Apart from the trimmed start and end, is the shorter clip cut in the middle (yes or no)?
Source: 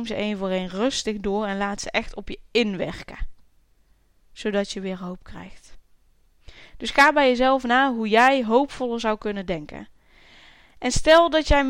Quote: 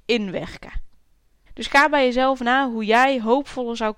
yes